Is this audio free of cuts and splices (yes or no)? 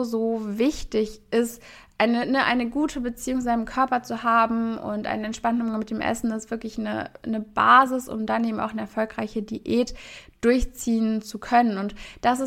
yes